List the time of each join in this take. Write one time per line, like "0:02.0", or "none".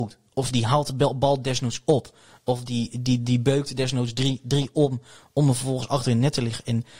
none

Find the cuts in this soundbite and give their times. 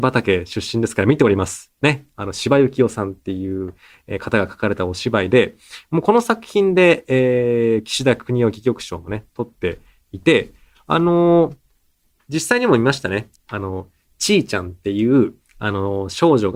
0:13.4

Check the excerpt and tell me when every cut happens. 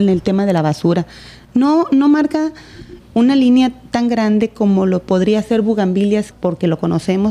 0:03.0
0:06.3

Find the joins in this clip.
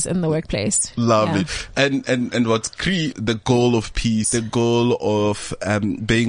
0:03.1
0:04.2

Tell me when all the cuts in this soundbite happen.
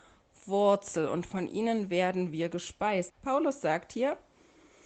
0:03.1

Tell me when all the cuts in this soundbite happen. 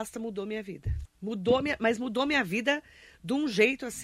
0:01.0

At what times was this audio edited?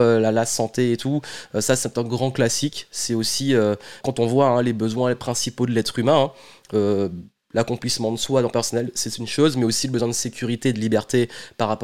0:04.0

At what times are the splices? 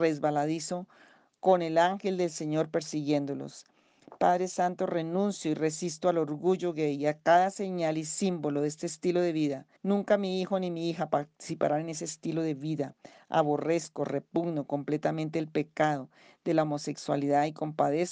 0:09.8

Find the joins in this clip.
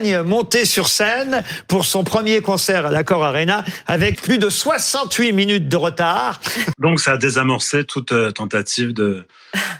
0:04.1
0:06.7

